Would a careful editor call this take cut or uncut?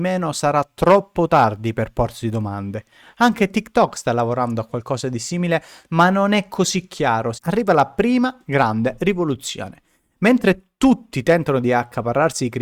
cut